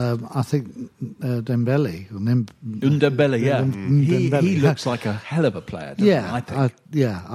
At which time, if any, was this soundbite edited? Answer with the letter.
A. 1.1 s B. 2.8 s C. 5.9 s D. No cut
D